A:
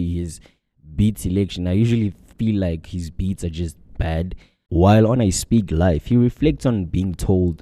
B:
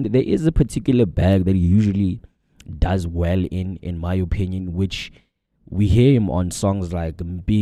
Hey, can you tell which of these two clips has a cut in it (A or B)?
A